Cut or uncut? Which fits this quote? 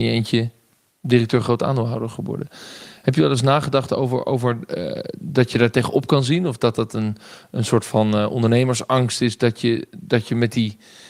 uncut